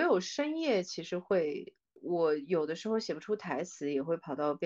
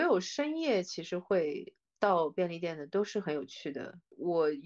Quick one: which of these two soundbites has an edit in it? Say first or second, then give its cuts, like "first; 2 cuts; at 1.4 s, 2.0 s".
first; 1 cut; at 1.9 s